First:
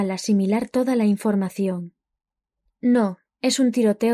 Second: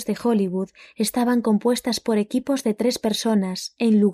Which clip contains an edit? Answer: first; 1 cut; at 2.7 s

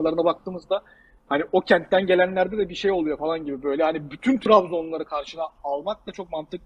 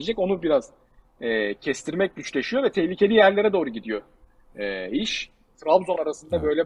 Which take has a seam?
second; 1 cut; at 5.5 s

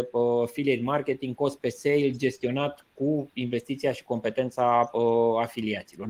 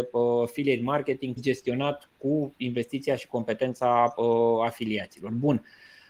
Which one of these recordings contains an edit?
second; 1 cut; at 1.4 s

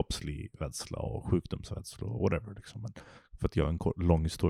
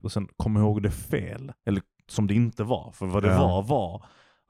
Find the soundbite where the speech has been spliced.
second; 1 cut; at 1.6 s

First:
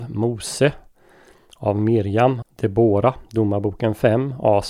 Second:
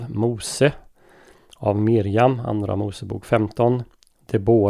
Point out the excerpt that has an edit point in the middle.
first; 1 cut; at 2.4 s

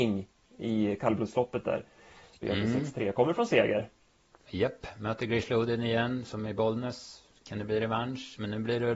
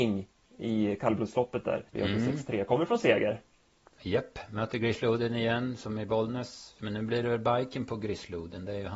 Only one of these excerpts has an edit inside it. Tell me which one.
second; 2 cuts; at 1.9 s, 6.8 s

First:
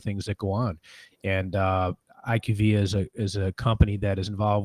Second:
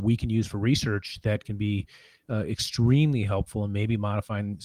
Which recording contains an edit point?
first; 1 cut; at 1.1 s

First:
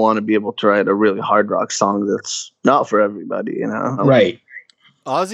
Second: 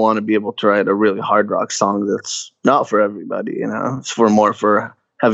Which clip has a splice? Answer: first; 1 cut; at 4.0 s

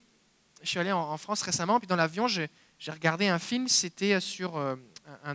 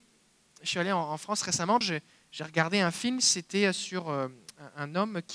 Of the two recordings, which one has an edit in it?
second; 1 cut; at 1.8 s

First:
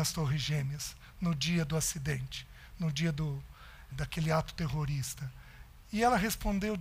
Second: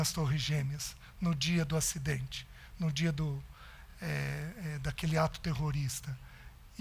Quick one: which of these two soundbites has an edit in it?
first; 1 cut; at 3.9 s

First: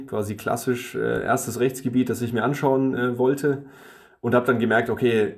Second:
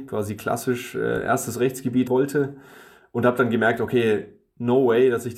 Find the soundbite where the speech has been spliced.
second; 1 cut; at 2.1 s

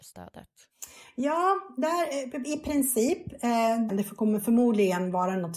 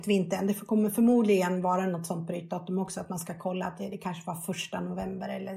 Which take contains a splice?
first; 1 cut; at 3.9 s

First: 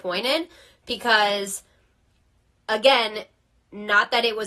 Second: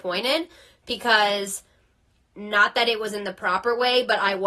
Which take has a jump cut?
second; 1 cut; at 2.2 s

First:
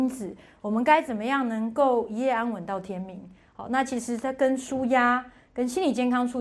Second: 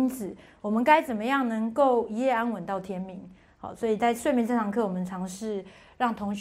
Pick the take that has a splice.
second; 1 cut; at 3.5 s

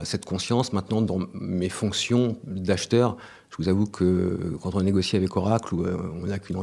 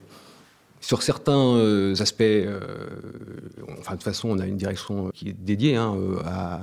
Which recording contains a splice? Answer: second; 1 cut; at 5.1 s

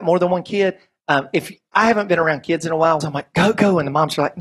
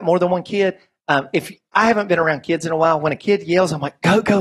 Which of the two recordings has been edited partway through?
first; 1 cut; at 3.0 s

